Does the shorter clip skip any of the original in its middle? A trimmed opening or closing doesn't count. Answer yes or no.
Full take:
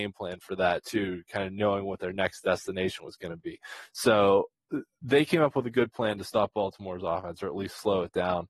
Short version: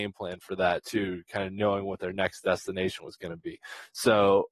no